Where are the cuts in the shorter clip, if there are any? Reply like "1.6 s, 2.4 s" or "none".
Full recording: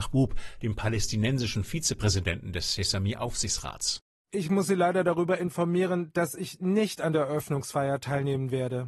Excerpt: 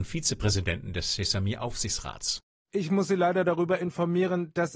none